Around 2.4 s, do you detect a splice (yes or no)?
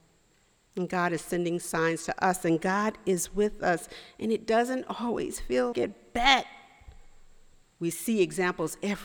no